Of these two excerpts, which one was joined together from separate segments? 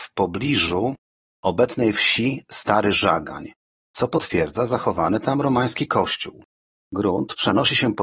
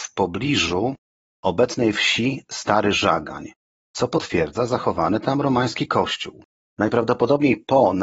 second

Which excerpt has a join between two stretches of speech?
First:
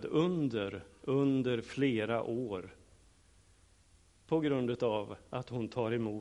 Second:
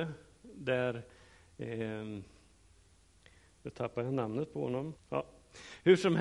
second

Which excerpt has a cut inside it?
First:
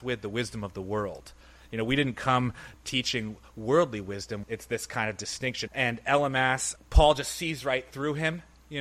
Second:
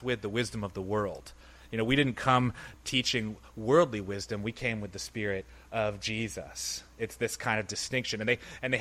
first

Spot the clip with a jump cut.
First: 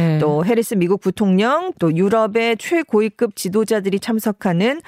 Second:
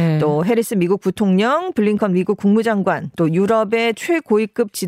first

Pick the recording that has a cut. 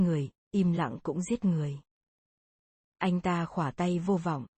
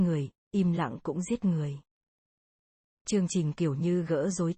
first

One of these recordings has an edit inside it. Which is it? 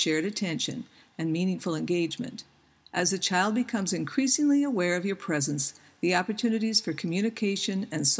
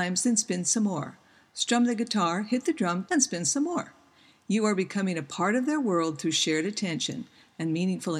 second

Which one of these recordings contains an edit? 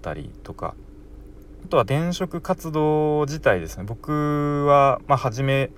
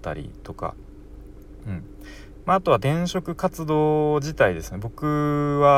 first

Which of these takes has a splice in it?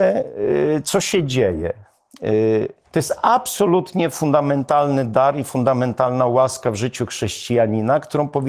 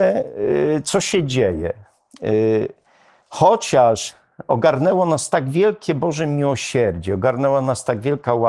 first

